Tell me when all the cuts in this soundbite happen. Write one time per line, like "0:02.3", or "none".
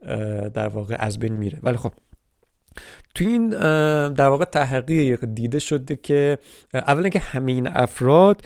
none